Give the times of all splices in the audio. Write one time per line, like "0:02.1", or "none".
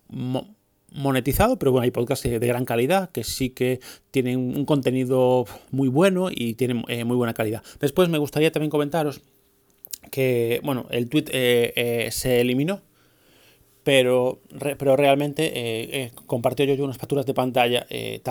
0:07.8